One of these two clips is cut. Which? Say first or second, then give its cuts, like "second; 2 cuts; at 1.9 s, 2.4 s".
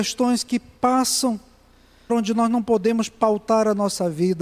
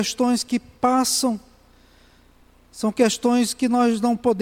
first; 1 cut; at 2.1 s